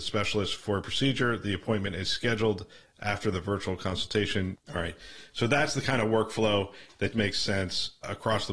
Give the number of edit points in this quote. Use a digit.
2